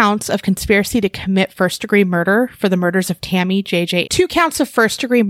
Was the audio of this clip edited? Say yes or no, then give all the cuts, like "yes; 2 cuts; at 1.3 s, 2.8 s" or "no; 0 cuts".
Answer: yes; 1 cut; at 4.0 s